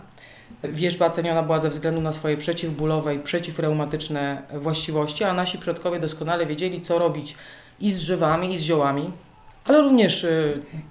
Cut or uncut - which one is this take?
uncut